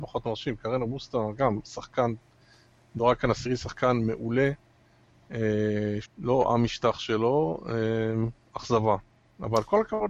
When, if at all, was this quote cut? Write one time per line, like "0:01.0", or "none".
0:06.0